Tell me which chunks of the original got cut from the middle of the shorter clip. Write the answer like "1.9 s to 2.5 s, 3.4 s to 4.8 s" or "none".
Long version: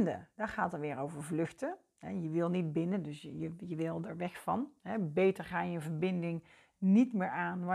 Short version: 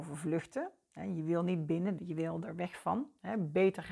3.0 s to 3.6 s